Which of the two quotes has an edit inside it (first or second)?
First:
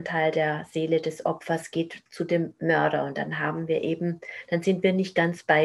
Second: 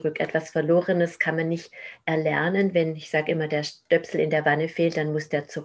first